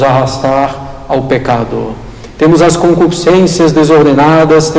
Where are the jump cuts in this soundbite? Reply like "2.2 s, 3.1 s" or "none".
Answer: none